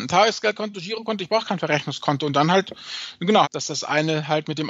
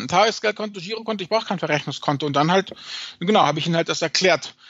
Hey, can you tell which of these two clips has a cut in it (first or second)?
first